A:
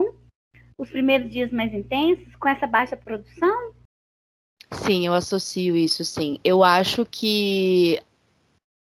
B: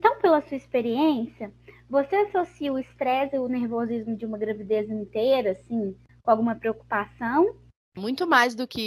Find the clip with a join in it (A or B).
B